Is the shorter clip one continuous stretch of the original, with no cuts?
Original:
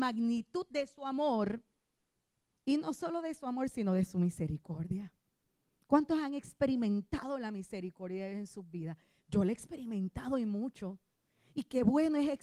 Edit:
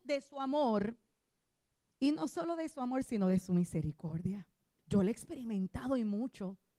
no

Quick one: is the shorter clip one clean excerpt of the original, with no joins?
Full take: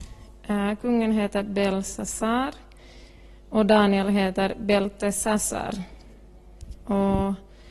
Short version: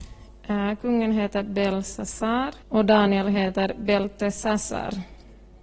no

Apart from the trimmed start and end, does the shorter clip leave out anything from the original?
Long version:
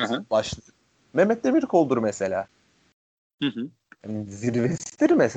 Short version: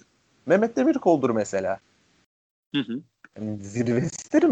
no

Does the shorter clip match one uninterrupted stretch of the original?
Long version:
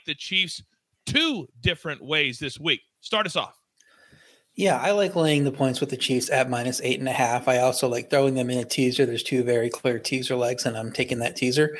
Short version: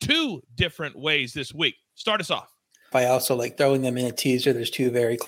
no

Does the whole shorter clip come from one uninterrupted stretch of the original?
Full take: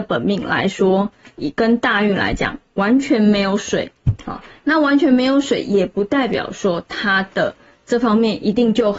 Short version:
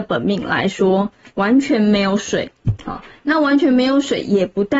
no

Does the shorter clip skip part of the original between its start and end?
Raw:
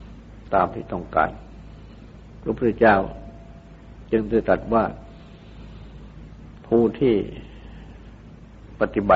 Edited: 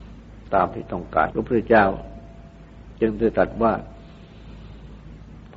yes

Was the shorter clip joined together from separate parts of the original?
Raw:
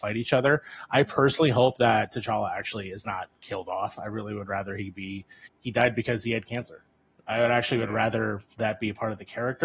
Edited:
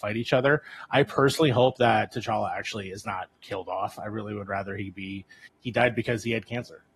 no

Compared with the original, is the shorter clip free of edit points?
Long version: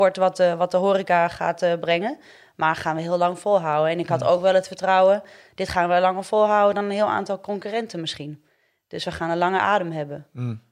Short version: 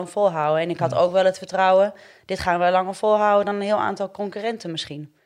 yes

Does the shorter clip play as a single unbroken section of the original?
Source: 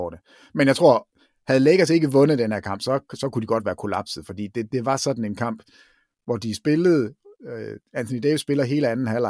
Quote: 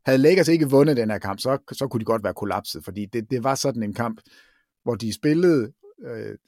yes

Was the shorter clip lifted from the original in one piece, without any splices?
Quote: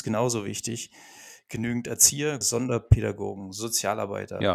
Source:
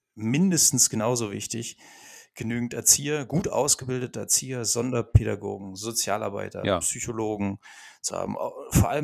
no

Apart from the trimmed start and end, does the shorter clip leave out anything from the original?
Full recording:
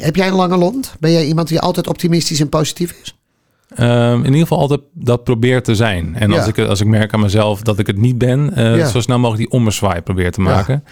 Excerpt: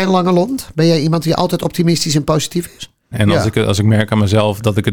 yes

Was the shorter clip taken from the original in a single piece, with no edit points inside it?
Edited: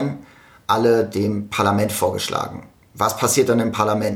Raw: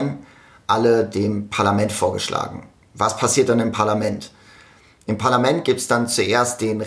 yes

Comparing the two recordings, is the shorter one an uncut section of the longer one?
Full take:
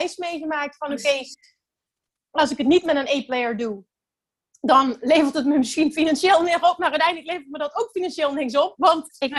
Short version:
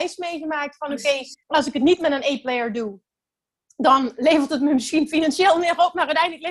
no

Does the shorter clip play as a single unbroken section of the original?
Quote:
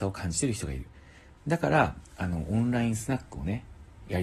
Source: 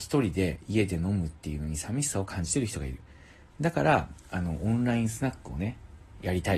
yes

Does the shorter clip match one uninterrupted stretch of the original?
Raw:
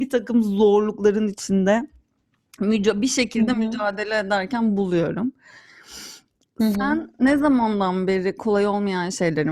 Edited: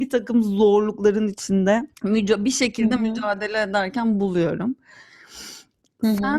no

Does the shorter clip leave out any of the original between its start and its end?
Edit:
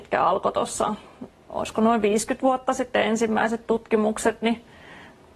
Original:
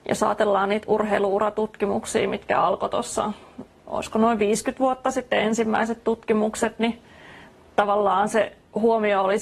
no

